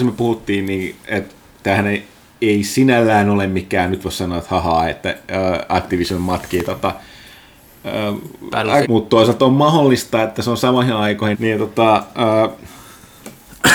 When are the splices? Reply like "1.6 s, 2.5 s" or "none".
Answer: 8.8 s, 11.3 s